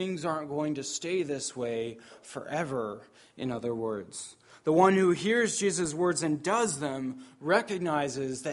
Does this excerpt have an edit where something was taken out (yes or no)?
no